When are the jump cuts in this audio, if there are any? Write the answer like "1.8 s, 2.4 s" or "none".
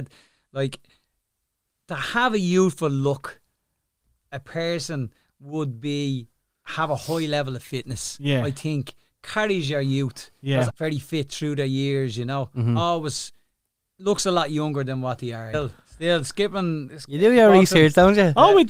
10.7 s, 15.5 s